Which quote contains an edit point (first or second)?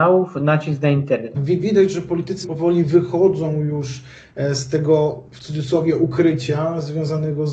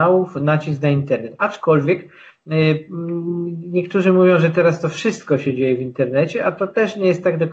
first